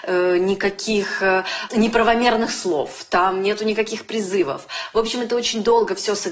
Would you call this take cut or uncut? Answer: uncut